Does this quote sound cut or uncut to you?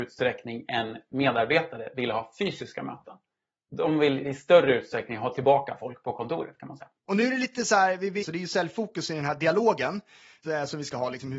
cut